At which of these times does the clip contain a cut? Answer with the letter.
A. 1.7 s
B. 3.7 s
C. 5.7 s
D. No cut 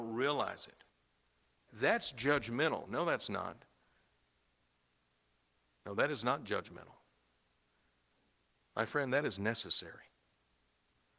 A